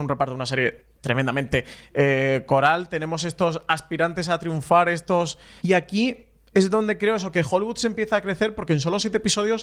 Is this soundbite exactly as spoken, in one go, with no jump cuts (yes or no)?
no